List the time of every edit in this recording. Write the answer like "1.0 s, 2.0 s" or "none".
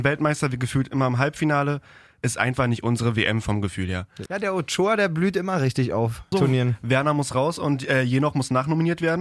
4.3 s, 6.3 s

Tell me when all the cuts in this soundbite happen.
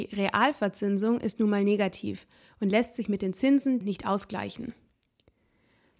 3.8 s

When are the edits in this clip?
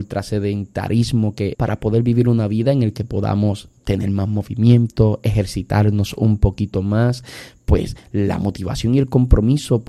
1.5 s

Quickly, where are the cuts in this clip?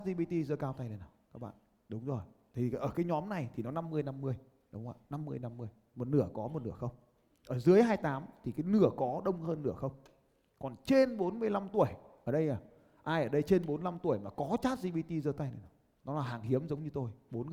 none

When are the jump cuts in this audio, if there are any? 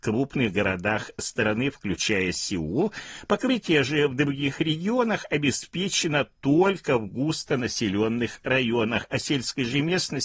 none

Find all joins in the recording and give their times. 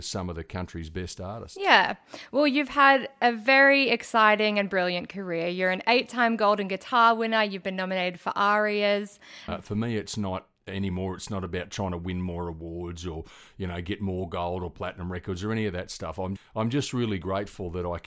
9.5 s, 16.4 s

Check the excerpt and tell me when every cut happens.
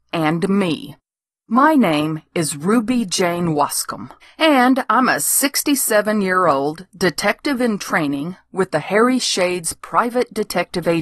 4.2 s

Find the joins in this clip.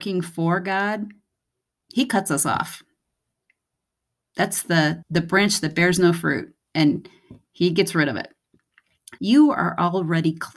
5.0 s, 9.2 s

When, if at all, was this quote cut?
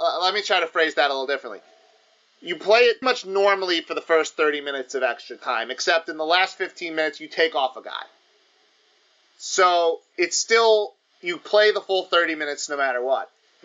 3.0 s

